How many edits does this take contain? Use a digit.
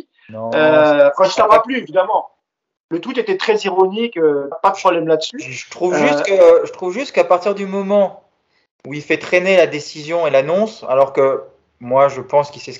1